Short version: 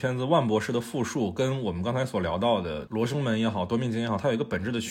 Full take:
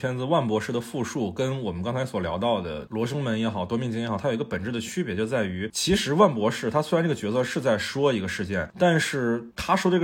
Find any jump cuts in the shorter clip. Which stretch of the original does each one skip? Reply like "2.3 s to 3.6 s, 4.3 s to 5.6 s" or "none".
none